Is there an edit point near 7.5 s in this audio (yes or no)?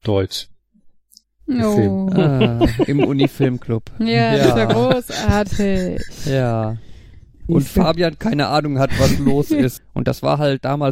yes